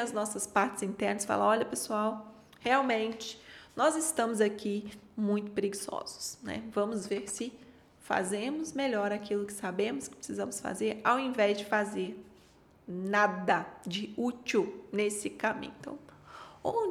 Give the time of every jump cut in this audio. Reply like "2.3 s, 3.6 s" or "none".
none